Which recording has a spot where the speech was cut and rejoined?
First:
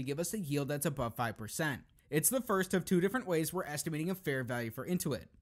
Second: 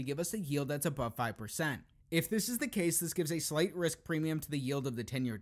first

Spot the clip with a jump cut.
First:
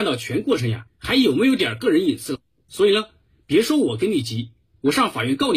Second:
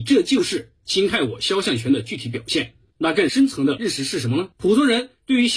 second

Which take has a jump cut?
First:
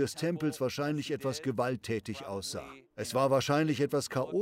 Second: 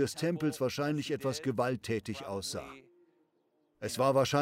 first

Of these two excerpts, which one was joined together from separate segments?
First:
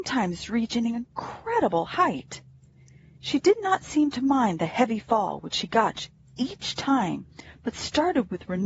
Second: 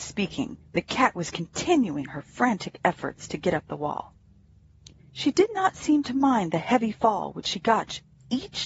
second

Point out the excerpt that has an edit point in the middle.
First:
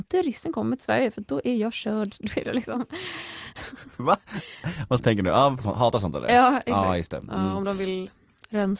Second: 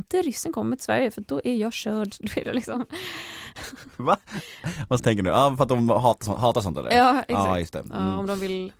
first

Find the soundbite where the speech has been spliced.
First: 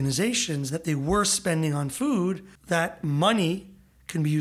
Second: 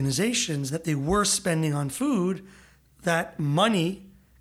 first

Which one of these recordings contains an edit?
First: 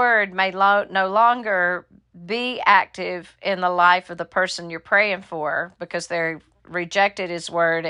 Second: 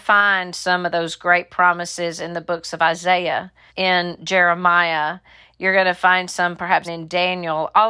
second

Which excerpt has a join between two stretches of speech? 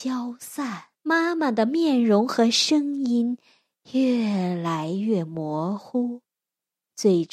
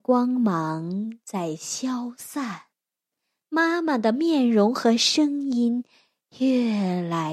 first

